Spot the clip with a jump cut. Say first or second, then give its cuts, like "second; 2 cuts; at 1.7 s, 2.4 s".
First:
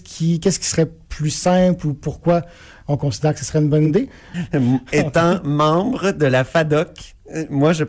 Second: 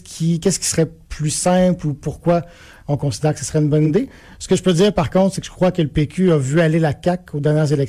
first; 1 cut; at 4.3 s